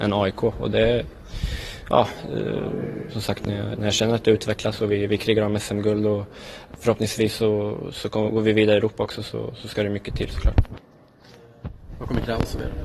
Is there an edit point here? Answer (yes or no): no